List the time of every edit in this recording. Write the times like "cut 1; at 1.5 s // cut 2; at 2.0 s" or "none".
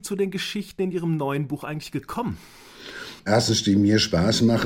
cut 1; at 3.2 s